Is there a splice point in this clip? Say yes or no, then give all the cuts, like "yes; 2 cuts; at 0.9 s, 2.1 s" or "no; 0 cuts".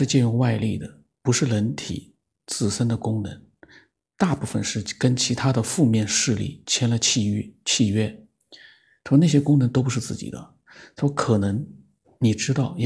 no; 0 cuts